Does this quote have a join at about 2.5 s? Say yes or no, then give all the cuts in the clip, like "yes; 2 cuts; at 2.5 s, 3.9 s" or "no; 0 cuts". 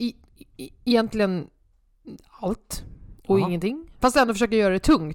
no; 1 cut; at 4.0 s